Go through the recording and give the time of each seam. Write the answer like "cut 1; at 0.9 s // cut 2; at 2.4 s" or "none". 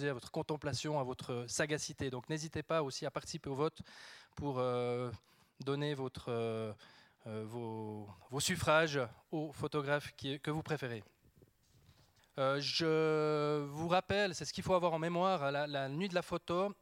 cut 1; at 12.2 s